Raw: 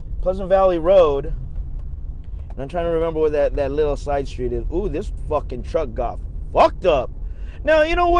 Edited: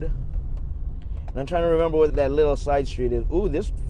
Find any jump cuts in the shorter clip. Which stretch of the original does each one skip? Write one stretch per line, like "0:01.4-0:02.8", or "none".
0:03.3-0:03.5